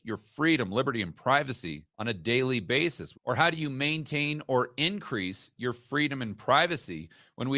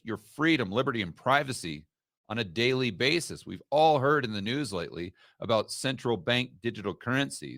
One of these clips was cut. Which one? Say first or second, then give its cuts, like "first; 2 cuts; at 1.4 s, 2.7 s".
first; 2 cuts; at 1.9 s, 3.1 s